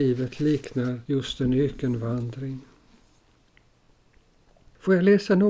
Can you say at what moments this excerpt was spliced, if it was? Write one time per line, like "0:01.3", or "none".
none